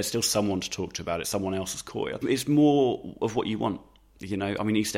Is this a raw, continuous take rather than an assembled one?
yes; 0 cuts

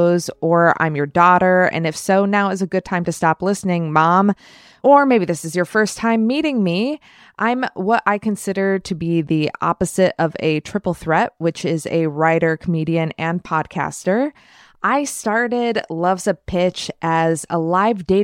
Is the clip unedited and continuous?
yes; 0 cuts

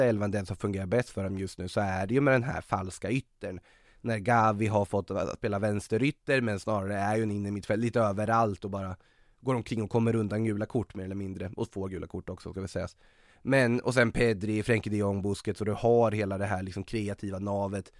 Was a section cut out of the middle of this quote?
no; 0 cuts

